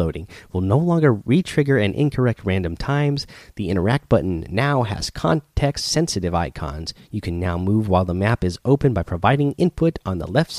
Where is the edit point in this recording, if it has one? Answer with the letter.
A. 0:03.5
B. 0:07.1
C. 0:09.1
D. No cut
A